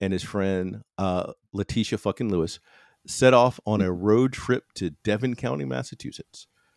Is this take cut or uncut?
uncut